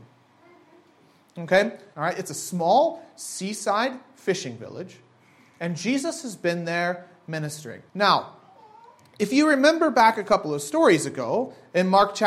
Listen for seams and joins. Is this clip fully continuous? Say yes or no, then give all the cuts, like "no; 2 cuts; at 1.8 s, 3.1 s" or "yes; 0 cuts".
no; 2 cuts; at 1.9 s, 7.9 s